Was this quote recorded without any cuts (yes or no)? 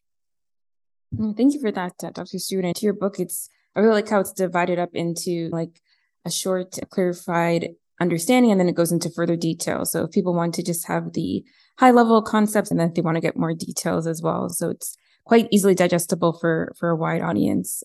yes